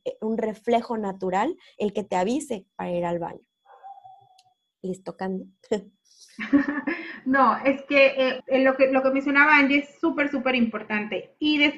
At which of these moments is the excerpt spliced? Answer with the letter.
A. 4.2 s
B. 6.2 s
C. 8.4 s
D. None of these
C